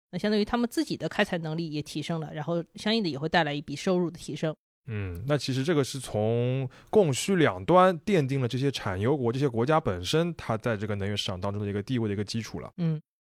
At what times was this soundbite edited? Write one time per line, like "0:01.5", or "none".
none